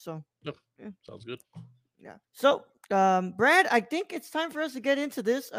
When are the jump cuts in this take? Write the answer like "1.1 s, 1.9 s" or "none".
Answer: 2.2 s